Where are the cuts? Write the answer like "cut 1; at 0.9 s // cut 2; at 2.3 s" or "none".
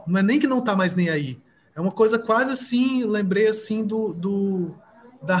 none